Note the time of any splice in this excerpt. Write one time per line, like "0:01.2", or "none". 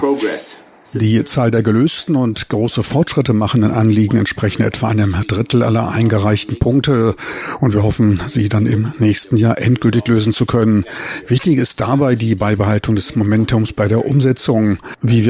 none